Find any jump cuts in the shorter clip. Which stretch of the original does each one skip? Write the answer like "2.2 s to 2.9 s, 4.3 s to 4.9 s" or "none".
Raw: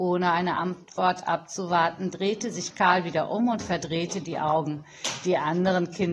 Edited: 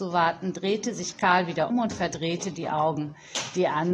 3.3 s to 3.4 s

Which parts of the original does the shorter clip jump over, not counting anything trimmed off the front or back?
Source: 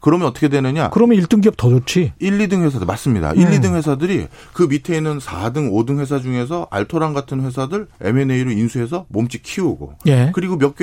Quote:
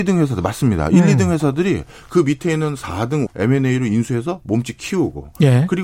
5.7 s to 7.9 s

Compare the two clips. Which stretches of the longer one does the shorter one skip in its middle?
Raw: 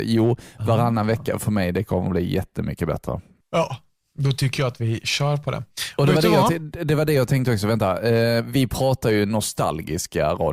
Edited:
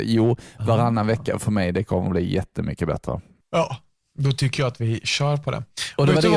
none

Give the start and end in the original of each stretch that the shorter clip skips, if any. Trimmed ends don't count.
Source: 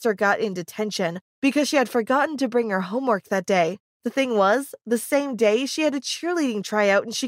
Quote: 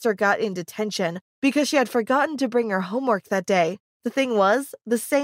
none

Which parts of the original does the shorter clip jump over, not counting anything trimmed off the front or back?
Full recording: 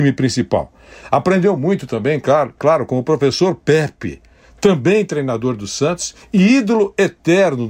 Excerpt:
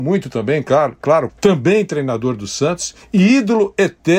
2.9 s to 4.5 s

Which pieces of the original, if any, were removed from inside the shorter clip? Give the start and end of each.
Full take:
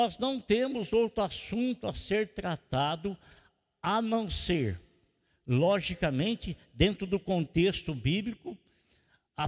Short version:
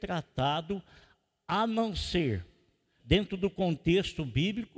5.3 s to 6.7 s

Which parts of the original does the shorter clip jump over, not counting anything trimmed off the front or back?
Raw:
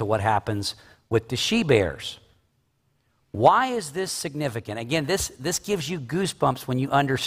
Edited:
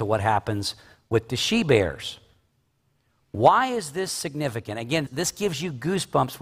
5.1 s to 5.3 s

